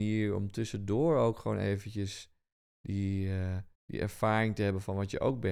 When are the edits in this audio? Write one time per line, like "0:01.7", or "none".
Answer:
0:03.7